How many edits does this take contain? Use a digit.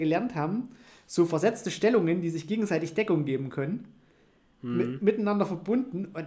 0